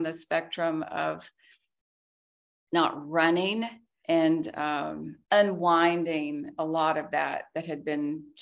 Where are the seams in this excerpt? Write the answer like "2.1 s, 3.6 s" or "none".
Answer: 4.0 s, 5.2 s